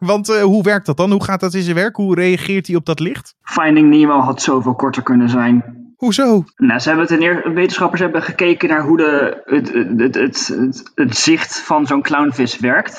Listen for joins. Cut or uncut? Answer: cut